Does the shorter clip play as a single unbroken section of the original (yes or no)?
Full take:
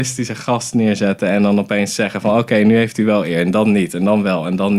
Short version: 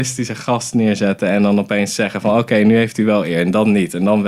yes